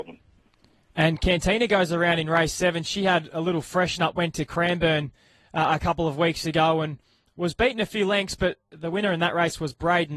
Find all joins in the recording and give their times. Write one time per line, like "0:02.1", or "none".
none